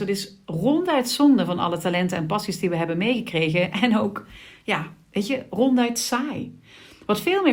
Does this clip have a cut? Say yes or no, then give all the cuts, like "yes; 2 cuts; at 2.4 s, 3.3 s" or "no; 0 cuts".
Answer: no; 0 cuts